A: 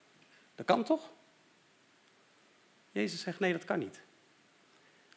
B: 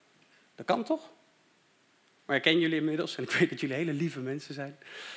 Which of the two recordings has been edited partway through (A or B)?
B